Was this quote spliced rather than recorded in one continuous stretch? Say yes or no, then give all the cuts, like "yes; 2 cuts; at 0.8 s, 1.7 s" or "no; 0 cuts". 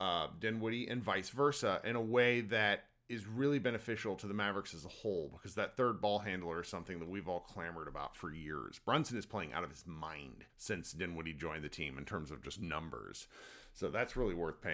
yes; 1 cut; at 10.5 s